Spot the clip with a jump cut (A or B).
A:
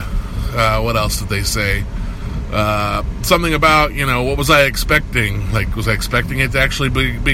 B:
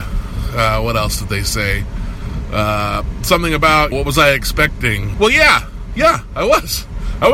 B